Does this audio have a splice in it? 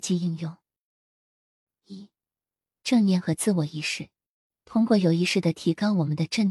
yes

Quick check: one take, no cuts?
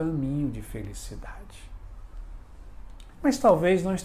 no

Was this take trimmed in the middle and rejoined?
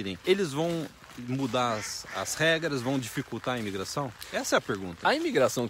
no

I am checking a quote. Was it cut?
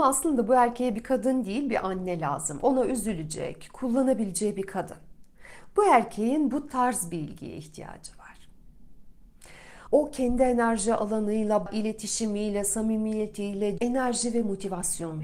yes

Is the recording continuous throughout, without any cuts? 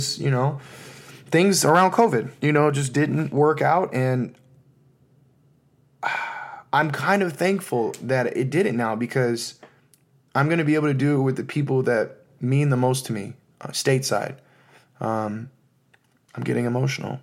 no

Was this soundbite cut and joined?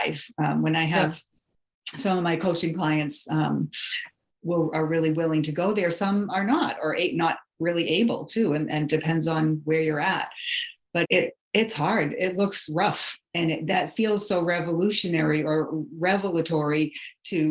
yes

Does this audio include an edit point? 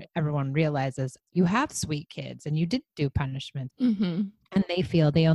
yes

